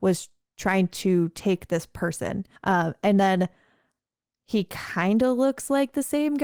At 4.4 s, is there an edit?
no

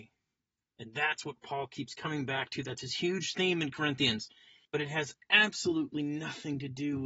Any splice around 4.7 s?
yes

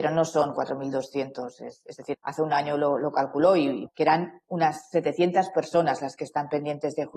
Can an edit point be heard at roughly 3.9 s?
yes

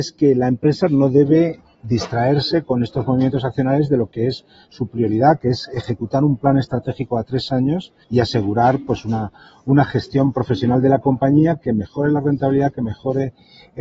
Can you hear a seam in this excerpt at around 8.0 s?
yes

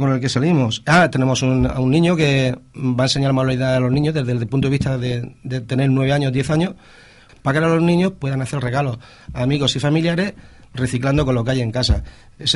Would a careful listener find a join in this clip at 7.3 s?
yes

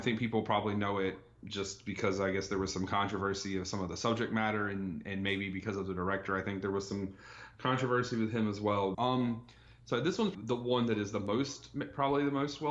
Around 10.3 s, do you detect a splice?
yes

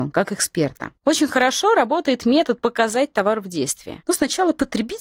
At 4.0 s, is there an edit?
yes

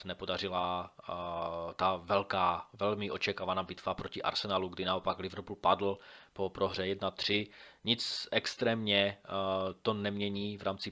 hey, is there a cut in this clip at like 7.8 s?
no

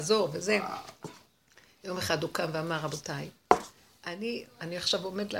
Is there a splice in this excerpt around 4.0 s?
no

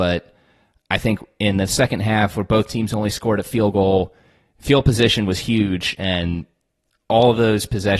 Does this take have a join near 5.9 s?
no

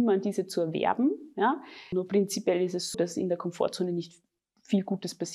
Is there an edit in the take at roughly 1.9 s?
yes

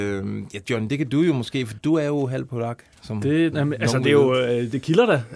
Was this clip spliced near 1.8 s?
yes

